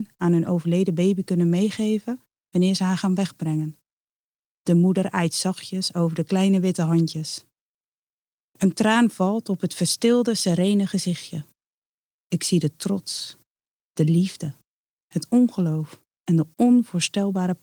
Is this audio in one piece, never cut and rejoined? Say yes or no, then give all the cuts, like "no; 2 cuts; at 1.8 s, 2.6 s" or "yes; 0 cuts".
yes; 0 cuts